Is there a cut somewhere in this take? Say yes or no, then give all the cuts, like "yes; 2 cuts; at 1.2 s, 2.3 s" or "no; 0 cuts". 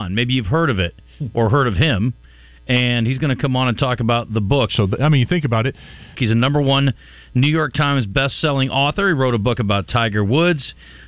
yes; 2 cuts; at 4.7 s, 6.1 s